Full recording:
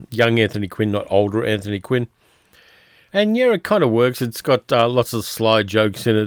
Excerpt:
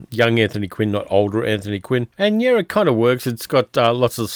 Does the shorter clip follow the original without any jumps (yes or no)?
no